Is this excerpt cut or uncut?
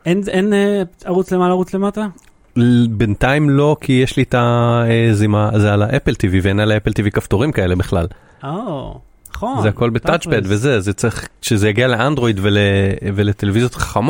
uncut